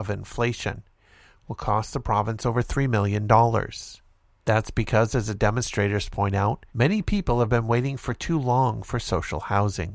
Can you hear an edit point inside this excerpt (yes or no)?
yes